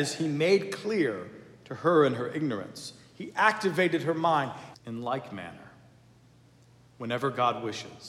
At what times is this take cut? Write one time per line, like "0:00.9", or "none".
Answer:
0:04.7